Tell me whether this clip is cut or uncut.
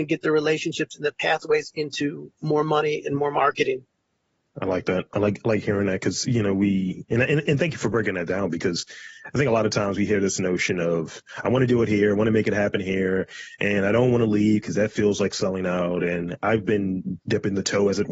uncut